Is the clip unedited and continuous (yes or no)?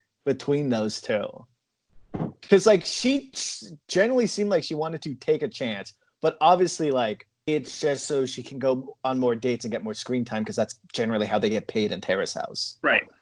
no